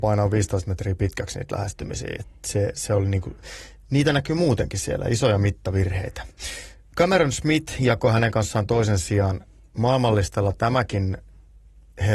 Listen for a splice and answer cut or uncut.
uncut